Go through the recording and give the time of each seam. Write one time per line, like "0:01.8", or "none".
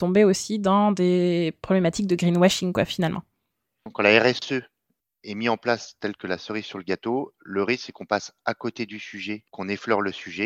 0:09.5